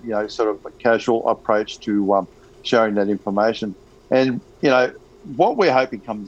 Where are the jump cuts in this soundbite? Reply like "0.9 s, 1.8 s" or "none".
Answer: none

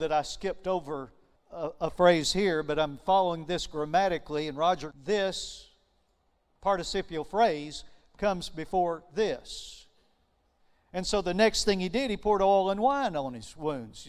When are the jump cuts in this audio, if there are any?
1.4 s, 4.9 s

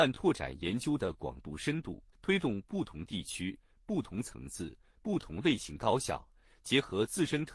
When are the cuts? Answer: 2.1 s

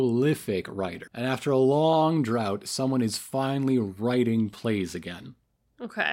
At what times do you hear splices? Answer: 1.1 s

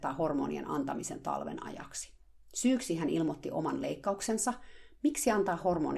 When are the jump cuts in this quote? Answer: none

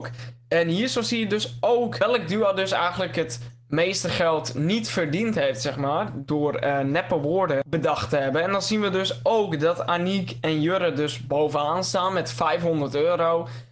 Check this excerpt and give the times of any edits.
none

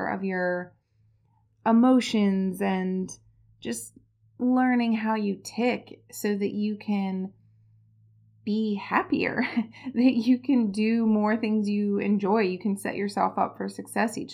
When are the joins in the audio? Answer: none

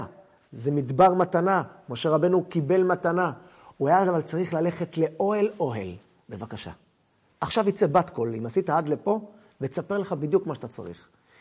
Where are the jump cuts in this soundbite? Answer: 6.2 s

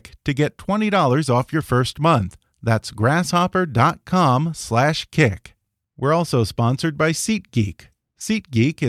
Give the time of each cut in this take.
none

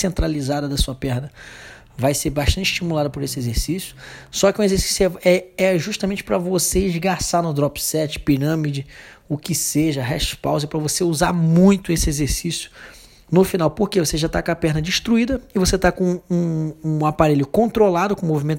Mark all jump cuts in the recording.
none

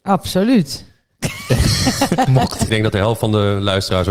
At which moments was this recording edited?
2.7 s

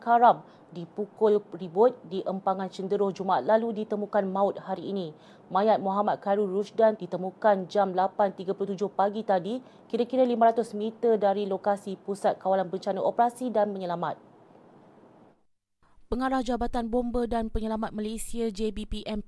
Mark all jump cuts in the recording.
7.0 s

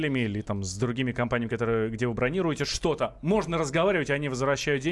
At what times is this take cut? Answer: none

